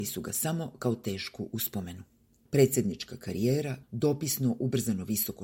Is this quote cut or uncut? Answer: cut